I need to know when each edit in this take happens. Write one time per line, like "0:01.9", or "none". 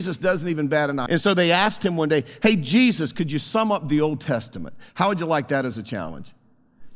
0:01.1